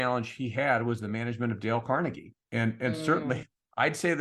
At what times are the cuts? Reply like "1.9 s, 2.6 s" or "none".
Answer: none